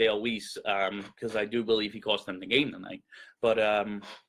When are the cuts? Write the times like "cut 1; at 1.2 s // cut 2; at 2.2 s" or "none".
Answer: cut 1; at 3.4 s